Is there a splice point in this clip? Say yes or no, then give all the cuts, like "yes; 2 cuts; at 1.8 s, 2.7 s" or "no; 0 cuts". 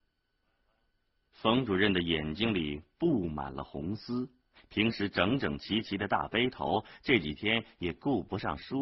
yes; 2 cuts; at 1.3 s, 4.6 s